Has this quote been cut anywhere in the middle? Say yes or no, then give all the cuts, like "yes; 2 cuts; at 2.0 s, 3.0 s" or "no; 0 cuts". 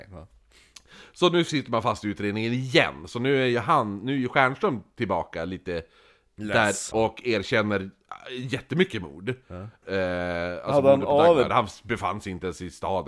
yes; 3 cuts; at 6.9 s, 9.8 s, 11.5 s